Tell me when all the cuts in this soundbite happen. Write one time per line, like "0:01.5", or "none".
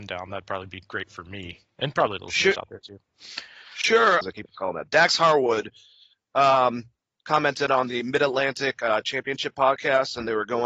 0:04.2